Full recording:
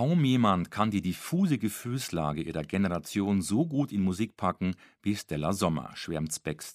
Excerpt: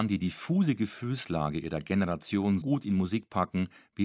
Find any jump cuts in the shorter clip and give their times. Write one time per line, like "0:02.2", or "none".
0:02.6